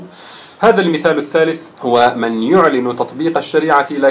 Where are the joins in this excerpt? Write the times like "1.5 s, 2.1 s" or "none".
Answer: 1.7 s